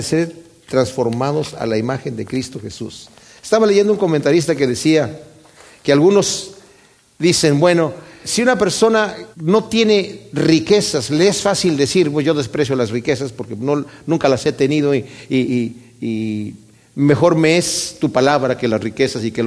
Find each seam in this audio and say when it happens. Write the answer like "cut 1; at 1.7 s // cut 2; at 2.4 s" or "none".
cut 1; at 8.2 s // cut 2; at 9.3 s